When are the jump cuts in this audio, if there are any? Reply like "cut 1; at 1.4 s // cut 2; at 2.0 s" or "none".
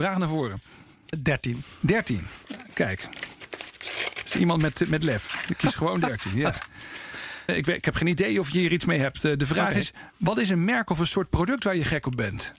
cut 1; at 1.1 s // cut 2; at 7.5 s